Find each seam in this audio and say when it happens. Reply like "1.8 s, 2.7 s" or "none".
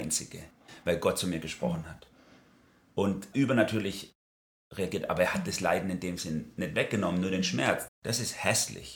3.3 s, 7.9 s